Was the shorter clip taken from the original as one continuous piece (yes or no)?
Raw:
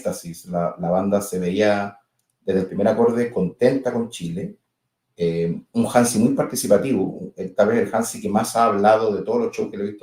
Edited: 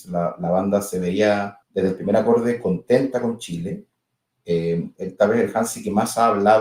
no